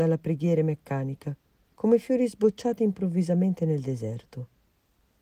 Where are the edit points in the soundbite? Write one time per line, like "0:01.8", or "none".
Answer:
0:01.7